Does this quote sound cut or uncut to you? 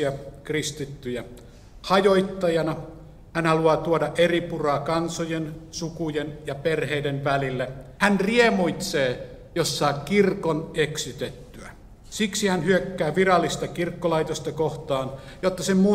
cut